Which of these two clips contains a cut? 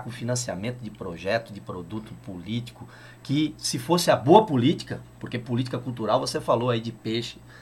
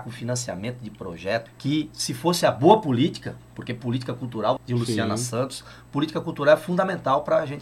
second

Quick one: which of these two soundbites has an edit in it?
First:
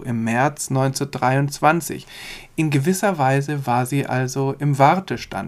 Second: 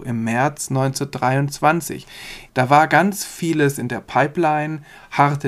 second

